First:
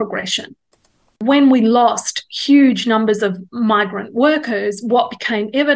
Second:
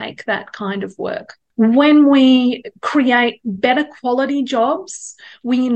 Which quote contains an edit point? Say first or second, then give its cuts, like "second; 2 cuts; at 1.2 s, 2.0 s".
first; 1 cut; at 1.2 s